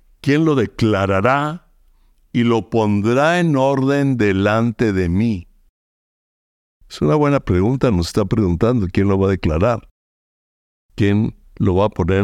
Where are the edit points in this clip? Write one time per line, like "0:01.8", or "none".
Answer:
none